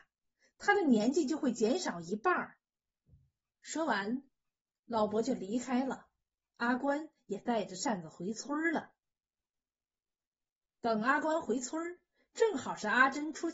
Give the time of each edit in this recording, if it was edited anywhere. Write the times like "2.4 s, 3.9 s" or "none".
2.7 s